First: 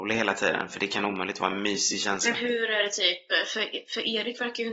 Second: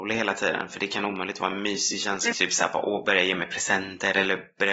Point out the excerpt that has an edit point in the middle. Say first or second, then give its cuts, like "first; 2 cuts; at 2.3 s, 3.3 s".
second; 1 cut; at 2.3 s